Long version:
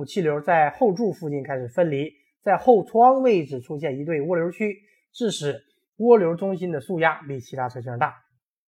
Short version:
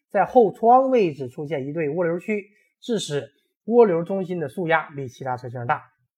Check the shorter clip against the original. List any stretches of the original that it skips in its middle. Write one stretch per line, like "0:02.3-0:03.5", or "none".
none

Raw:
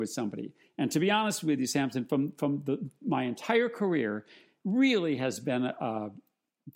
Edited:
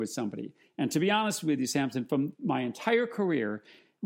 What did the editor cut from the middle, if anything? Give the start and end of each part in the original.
0:02.3-0:03.0

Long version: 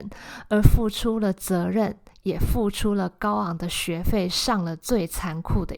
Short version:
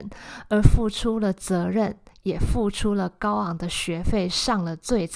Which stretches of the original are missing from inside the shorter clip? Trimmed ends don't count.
none

